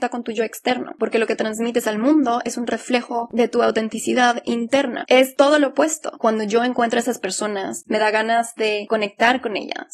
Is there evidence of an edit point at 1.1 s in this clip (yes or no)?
no